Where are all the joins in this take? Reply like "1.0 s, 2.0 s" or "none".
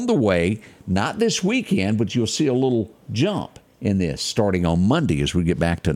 3.0 s